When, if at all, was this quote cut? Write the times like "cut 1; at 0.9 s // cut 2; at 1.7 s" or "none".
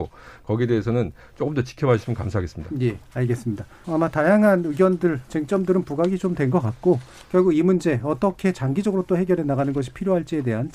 cut 1; at 3.8 s